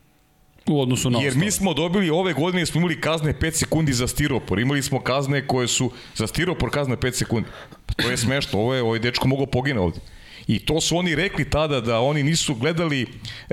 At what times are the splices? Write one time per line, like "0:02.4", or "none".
none